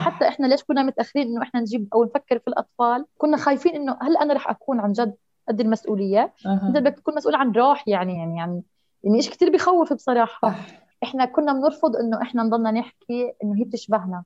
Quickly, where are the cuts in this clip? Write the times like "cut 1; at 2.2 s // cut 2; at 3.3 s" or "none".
none